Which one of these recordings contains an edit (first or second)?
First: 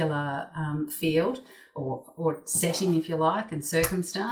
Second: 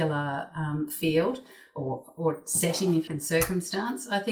second